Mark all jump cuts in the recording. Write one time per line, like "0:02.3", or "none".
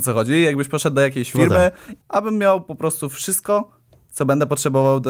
0:02.0